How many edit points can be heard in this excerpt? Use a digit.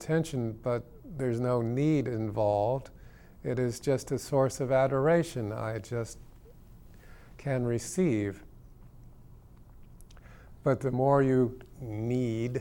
0